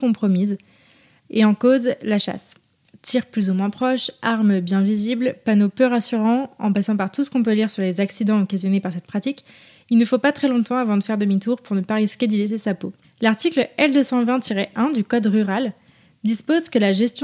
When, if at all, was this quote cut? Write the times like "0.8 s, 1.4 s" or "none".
13.0 s